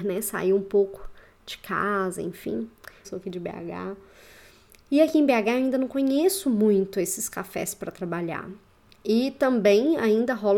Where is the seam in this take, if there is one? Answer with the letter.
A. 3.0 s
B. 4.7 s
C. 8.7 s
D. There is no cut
A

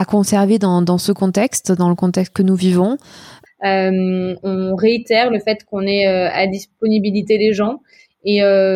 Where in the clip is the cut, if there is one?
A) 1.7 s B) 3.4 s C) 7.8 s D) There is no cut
B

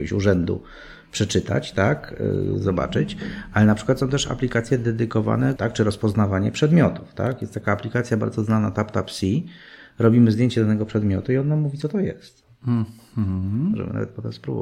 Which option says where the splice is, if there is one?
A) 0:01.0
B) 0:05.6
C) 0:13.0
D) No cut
B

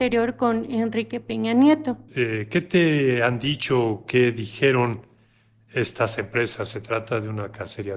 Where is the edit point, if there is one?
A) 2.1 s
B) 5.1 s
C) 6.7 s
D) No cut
A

